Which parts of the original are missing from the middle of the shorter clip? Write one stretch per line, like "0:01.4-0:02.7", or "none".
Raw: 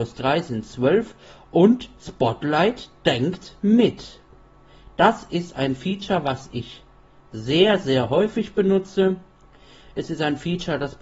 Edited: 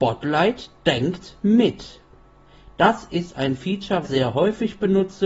0:06.2-0:07.8